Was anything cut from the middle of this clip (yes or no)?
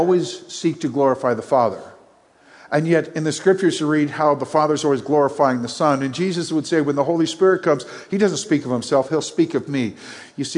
no